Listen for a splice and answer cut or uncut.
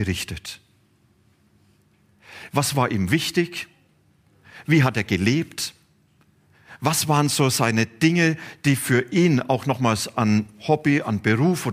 cut